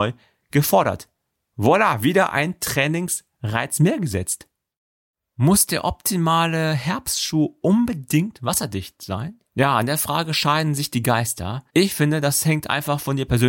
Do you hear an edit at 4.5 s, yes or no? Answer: no